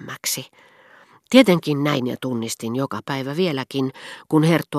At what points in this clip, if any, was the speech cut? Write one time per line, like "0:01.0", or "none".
0:01.3